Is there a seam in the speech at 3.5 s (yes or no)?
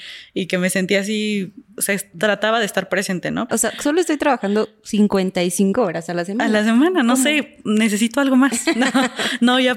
yes